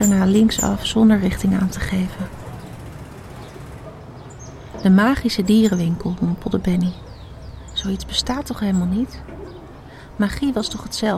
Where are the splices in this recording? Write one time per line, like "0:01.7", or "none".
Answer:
none